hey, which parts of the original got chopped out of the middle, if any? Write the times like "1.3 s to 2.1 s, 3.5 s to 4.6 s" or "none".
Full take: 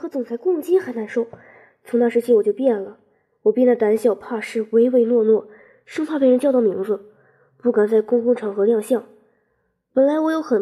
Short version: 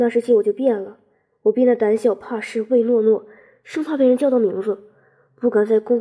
4.7 s to 4.9 s